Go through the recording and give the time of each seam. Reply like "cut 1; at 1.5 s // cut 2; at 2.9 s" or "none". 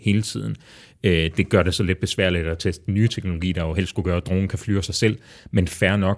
none